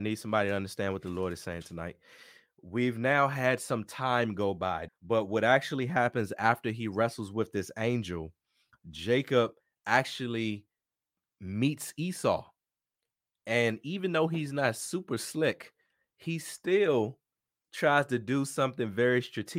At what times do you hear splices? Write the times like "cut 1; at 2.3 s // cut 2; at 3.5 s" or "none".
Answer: cut 1; at 4.9 s